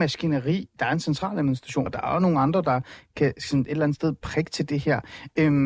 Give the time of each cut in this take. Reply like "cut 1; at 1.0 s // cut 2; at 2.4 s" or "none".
cut 1; at 1.9 s